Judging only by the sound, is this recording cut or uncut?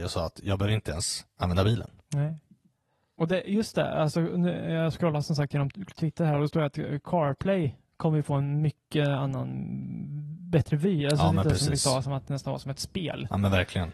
uncut